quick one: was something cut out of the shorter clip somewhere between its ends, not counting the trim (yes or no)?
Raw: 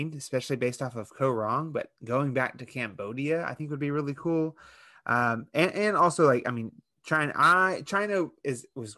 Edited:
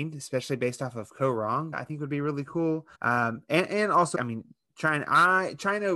yes